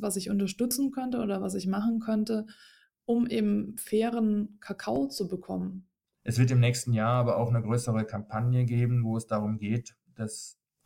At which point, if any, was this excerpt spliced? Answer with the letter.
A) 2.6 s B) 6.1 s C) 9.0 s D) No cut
B